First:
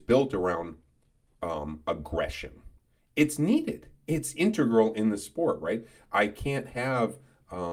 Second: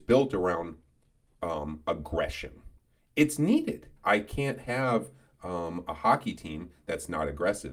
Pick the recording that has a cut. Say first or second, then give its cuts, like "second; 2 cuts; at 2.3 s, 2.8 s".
second; 1 cut; at 4.0 s